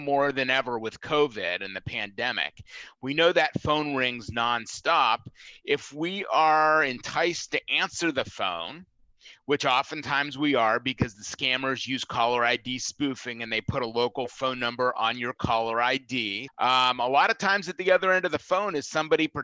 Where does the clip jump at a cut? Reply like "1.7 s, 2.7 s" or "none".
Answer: 16.5 s